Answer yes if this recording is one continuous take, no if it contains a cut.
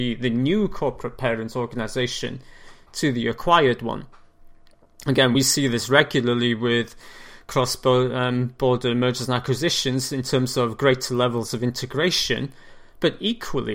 yes